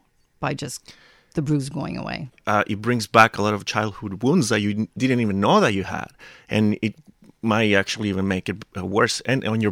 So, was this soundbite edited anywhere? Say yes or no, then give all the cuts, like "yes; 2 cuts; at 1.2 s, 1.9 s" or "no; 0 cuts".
yes; 1 cut; at 2.3 s